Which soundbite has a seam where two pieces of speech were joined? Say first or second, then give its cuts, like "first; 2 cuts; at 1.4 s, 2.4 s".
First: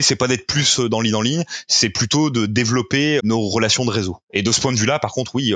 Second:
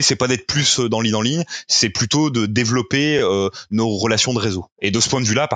first; 1 cut; at 3.2 s